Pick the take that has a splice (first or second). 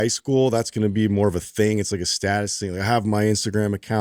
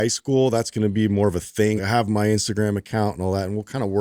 second